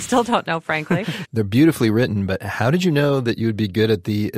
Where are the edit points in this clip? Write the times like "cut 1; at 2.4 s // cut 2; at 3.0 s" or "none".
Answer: cut 1; at 1.2 s

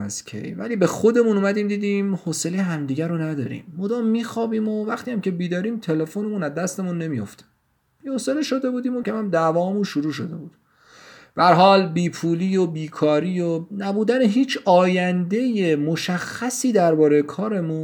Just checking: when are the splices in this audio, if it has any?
cut 1; at 9.0 s

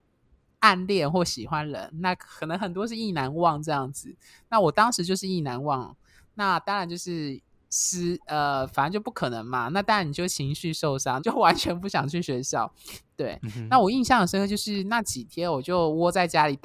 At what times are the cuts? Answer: cut 1; at 11.2 s // cut 2; at 13.0 s

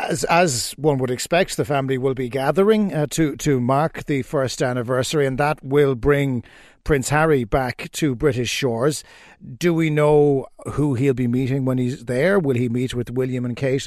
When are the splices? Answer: none

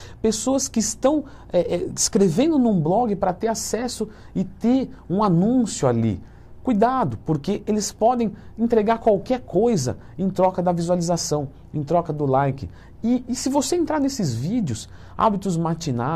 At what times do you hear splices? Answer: none

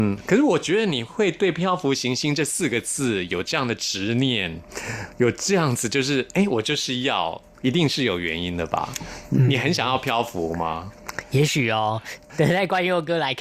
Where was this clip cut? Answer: none

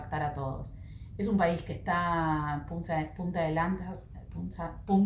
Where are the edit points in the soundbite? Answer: none

